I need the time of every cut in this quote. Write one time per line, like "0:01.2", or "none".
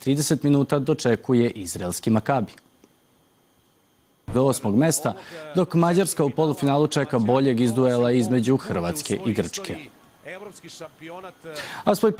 0:04.3